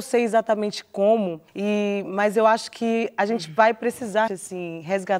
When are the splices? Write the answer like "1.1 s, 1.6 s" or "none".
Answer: 1.5 s, 4.3 s